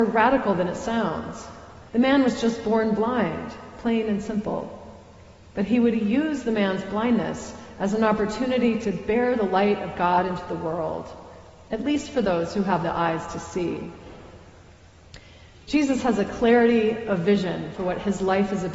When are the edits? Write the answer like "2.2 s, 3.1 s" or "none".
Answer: 1.9 s